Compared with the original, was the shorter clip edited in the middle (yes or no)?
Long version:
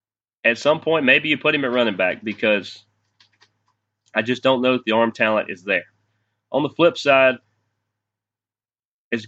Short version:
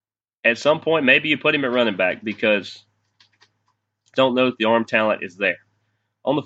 yes